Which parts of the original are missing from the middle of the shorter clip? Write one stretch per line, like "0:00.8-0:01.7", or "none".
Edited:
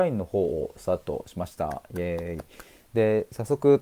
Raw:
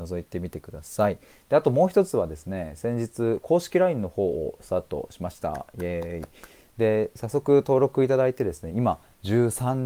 none